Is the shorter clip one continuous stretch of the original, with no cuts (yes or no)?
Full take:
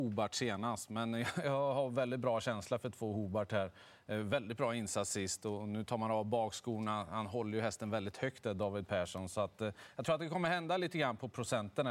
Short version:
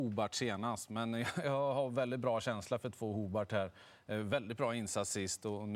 yes